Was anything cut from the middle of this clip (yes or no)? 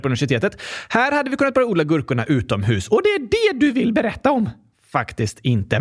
no